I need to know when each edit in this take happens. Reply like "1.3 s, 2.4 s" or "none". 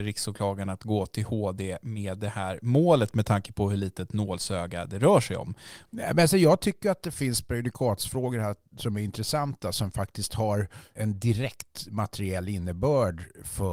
5.9 s, 10.9 s